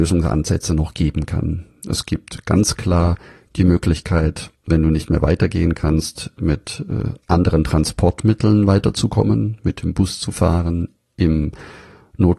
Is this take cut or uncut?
uncut